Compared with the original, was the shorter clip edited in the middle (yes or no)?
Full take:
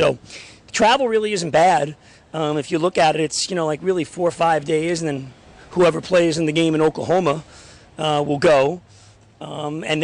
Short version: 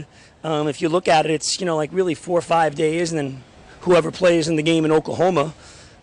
no